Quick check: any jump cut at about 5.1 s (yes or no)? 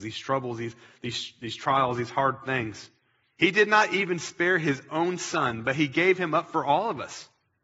no